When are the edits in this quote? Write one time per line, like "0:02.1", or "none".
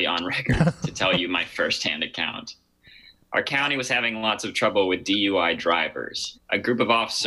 0:06.3